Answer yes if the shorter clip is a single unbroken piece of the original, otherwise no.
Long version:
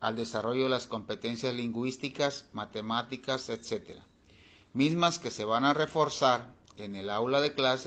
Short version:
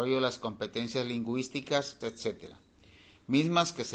no